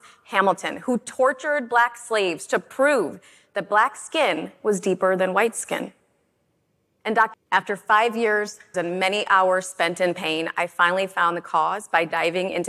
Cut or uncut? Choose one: cut